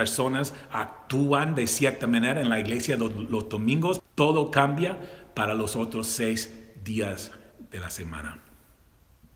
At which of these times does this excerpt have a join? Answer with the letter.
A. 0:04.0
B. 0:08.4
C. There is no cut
A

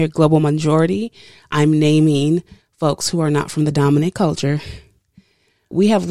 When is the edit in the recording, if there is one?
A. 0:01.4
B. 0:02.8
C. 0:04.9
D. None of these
D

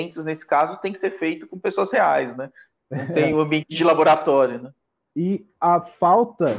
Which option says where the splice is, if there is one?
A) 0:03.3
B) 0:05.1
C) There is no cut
C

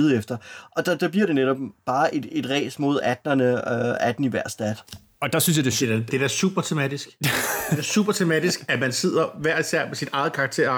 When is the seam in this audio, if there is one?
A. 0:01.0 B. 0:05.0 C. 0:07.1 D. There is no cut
D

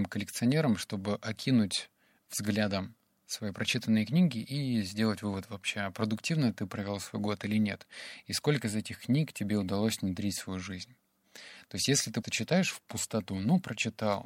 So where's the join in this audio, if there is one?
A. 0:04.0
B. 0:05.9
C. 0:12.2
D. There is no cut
C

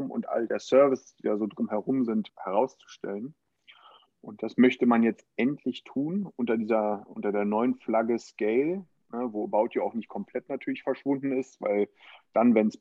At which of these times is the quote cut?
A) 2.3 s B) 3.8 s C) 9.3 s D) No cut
A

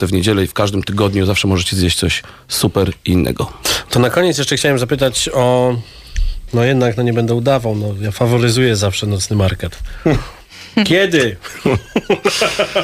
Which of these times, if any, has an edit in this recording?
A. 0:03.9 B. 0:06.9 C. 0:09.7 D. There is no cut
D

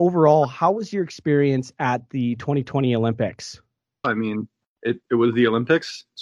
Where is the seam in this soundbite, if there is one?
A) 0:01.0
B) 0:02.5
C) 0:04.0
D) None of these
C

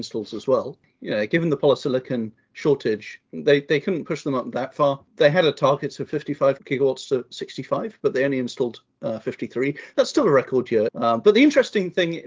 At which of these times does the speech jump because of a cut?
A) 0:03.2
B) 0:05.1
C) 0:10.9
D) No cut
C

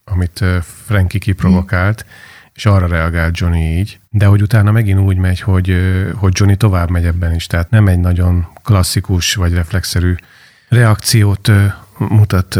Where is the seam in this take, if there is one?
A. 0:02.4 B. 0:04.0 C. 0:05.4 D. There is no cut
B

